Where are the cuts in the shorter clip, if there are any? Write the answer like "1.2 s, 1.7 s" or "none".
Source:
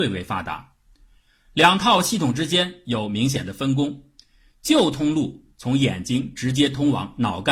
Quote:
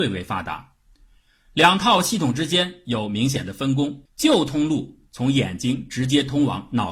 4.0 s